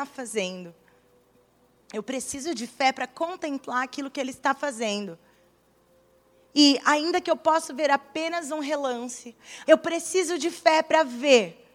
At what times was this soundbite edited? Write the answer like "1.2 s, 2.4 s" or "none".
1.8 s, 9.7 s